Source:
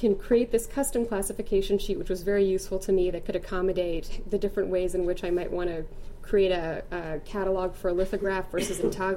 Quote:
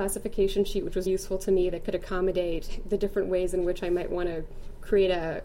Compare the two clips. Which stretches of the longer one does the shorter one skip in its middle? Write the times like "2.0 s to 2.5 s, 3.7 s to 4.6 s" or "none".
2.2 s to 2.5 s